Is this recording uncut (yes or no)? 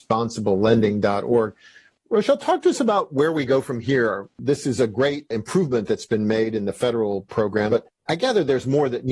no